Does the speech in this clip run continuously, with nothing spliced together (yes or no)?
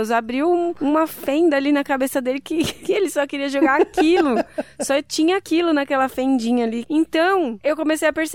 no